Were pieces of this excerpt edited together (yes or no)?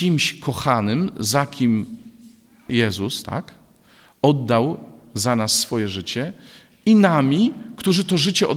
yes